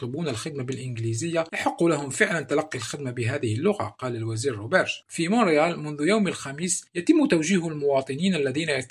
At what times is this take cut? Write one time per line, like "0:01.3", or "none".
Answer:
0:05.0